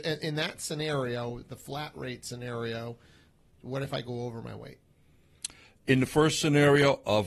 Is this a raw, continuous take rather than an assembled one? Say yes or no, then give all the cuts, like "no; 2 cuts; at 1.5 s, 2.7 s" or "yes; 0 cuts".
yes; 0 cuts